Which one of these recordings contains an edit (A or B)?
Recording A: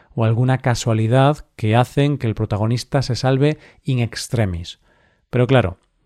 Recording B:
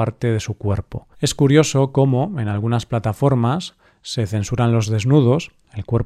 B